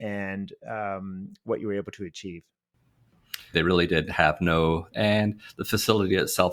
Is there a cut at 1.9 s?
no; 2 cuts; at 3.5 s, 4.9 s

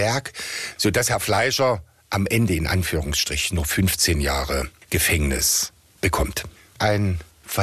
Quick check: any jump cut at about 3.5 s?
yes; 1 cut; at 3.5 s

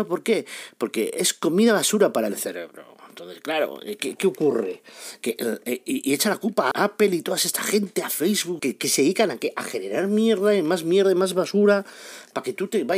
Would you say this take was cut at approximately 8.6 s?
yes; 2 cuts; at 6.7 s, 8.6 s

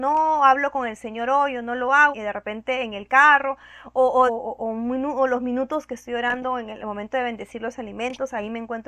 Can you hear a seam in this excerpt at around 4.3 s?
yes; 2 cuts; at 2.1 s, 4.3 s

